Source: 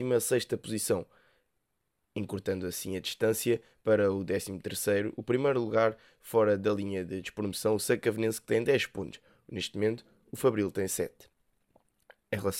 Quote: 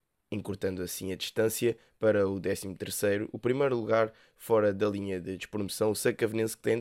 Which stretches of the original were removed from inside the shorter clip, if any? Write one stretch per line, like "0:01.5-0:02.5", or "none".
none